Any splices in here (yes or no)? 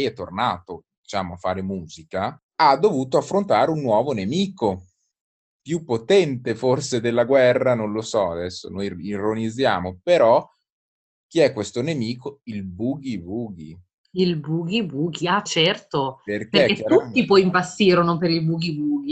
yes